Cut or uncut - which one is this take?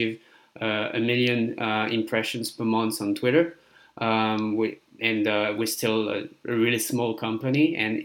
uncut